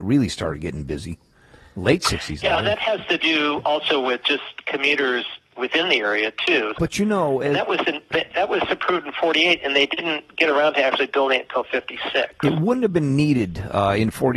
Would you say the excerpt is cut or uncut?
cut